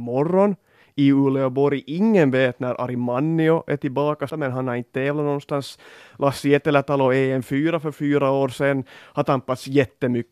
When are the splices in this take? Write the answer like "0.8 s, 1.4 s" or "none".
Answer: 4.3 s